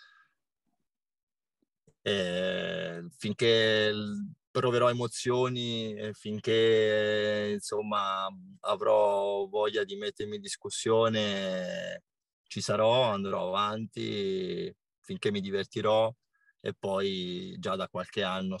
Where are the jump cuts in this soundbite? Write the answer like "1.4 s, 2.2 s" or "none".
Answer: none